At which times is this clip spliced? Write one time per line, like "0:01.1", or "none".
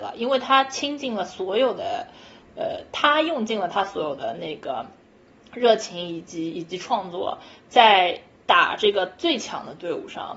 none